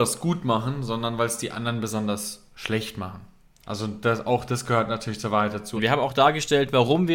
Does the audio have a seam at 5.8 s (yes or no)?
yes